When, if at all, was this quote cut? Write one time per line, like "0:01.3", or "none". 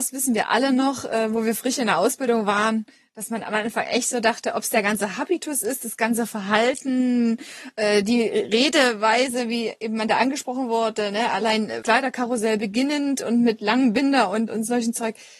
0:11.8
0:14.5